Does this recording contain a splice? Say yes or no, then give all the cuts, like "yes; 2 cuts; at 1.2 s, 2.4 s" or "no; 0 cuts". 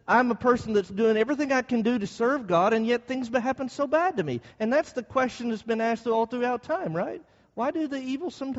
no; 0 cuts